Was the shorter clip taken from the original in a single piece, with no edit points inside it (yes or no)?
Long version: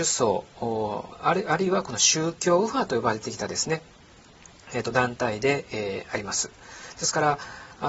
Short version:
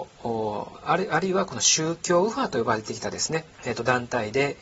no